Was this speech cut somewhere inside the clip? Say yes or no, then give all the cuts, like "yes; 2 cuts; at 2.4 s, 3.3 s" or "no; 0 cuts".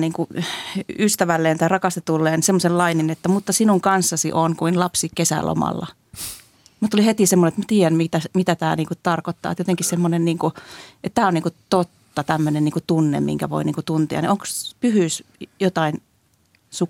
no; 0 cuts